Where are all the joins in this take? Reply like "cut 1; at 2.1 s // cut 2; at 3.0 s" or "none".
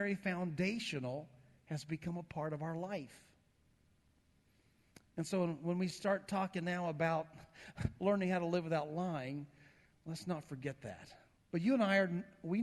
cut 1; at 11.4 s